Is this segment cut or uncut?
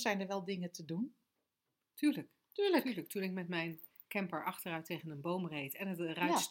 uncut